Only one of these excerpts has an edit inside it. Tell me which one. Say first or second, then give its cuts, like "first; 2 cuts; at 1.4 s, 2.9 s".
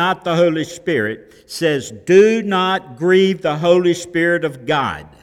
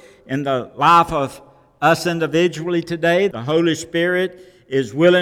second; 1 cut; at 3.3 s